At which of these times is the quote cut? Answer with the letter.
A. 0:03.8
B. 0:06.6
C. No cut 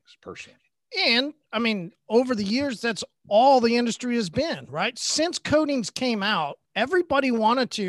B